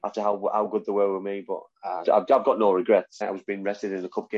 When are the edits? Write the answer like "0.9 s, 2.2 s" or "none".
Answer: 2.0 s, 3.2 s